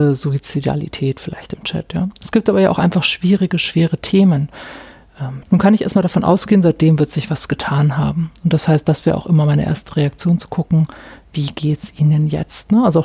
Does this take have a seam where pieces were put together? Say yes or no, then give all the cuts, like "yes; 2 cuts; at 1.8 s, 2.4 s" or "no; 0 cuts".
yes; 1 cut; at 5.4 s